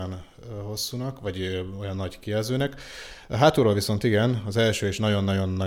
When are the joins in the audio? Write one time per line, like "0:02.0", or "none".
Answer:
0:03.3